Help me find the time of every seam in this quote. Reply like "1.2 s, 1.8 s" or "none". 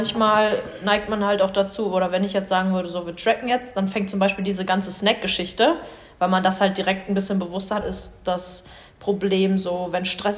7.8 s